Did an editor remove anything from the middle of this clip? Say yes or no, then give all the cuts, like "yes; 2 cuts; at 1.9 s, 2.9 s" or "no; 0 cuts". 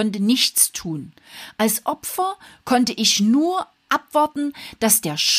no; 0 cuts